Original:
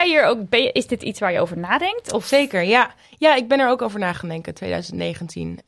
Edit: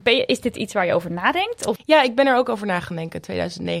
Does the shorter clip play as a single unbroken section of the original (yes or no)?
no